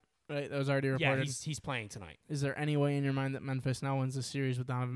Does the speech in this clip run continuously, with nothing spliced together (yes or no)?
yes